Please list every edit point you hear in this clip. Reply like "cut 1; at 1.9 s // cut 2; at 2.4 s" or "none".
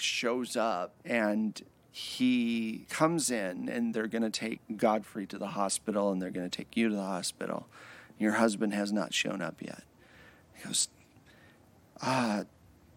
cut 1; at 1.0 s